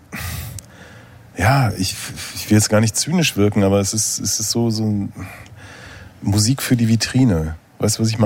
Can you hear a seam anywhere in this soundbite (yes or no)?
no